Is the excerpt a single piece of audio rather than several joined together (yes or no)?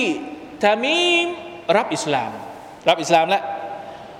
no